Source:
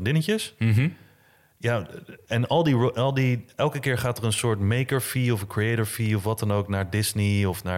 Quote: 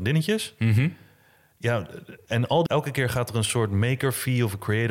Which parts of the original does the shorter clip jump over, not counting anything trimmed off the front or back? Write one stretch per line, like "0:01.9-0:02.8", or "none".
0:02.7-0:03.5